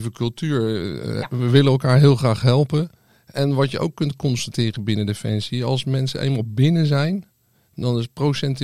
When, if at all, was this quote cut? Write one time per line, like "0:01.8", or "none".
none